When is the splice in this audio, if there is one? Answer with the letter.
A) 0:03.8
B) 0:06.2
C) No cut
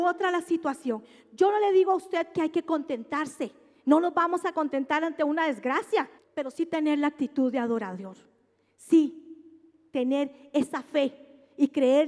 B